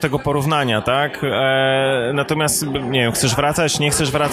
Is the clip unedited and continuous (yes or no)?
yes